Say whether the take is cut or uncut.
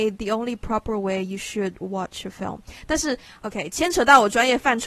uncut